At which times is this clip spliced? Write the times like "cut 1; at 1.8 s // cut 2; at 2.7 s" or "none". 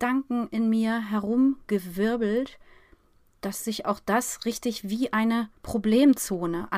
none